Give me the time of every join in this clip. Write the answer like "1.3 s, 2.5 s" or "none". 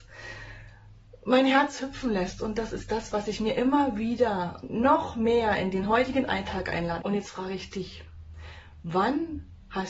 7.0 s